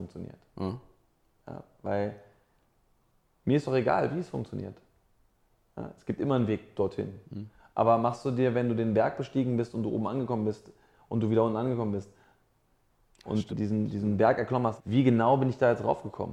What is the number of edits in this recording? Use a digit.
2